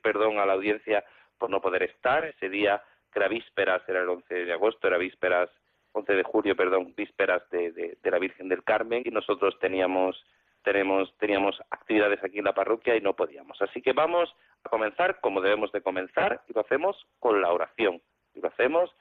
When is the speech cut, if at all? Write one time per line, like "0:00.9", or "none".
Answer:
0:02.3
0:09.0